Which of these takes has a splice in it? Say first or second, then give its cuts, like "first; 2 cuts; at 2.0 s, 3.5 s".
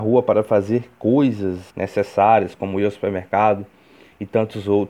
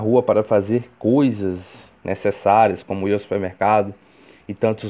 first; 1 cut; at 1.7 s